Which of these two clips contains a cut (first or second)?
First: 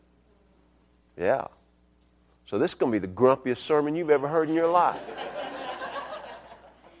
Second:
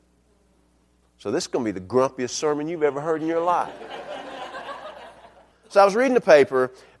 second